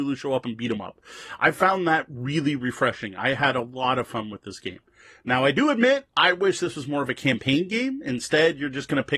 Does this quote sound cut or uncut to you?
uncut